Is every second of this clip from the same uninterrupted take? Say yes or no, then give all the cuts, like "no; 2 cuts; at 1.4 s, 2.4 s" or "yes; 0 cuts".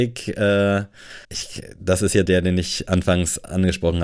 no; 2 cuts; at 1.2 s, 2.3 s